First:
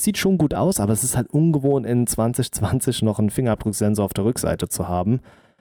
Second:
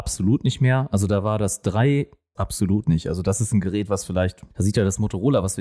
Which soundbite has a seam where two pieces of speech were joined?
second; 2 cuts; at 2.4 s, 4.5 s

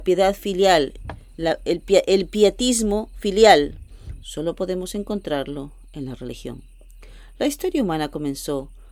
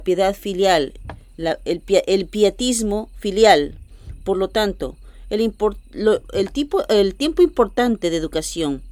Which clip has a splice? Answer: first; 1 cut; at 4.2 s

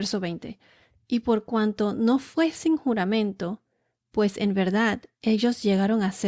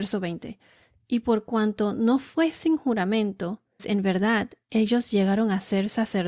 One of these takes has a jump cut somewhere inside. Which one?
second; 1 cut; at 3.8 s

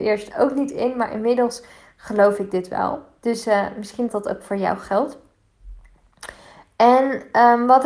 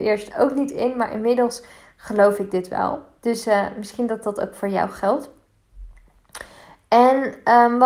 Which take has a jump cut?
first; 1 cut; at 4.1 s

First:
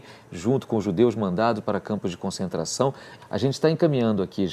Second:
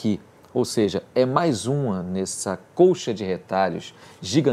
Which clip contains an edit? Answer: first; 1 cut; at 3.2 s

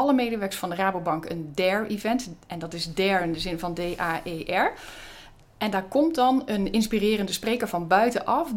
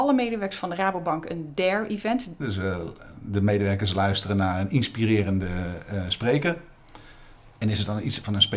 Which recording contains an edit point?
second; 1 cut; at 2.4 s

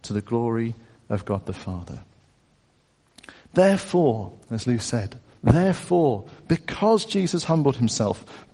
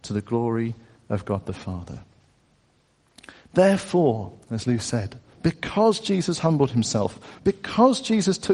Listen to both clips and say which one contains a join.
second; 2 cuts; at 5.4 s, 7.4 s

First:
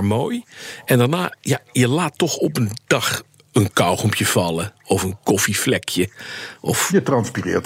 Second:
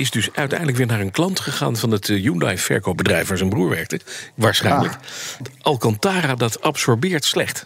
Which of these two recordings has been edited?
second; 1 cut; at 5.4 s

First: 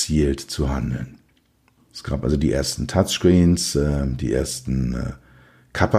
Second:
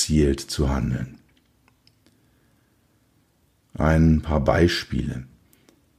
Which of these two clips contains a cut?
first; 1 cut; at 1.8 s

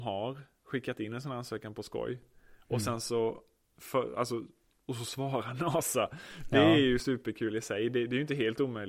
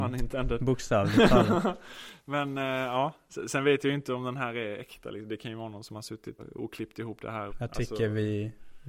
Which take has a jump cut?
second; 2 cuts; at 6.4 s, 7.5 s

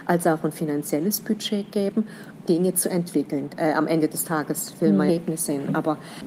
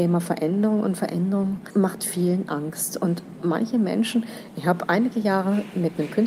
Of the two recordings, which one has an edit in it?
first; 3 cuts; at 2.4 s, 3.5 s, 5.1 s

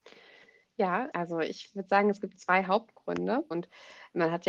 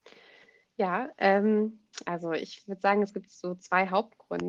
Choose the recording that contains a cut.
first; 3 cuts; at 1.1 s, 2.3 s, 3.5 s

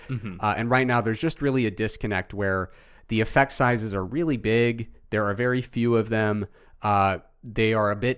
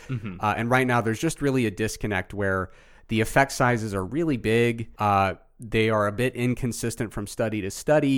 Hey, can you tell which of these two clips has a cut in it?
second; 1 cut; at 5.0 s

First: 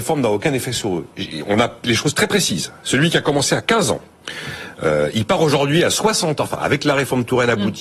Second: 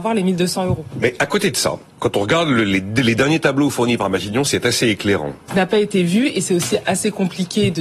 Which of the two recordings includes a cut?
second; 2 cuts; at 1.9 s, 5.5 s

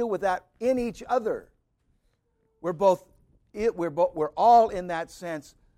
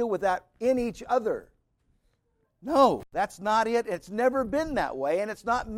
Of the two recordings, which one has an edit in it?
second; 1 cut; at 2.4 s

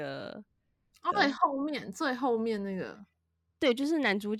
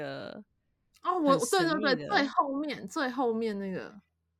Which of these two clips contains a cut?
first; 1 cut; at 1.1 s

